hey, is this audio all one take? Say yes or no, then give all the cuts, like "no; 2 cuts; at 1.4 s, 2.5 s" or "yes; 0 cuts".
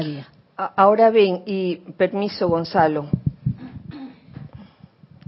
yes; 0 cuts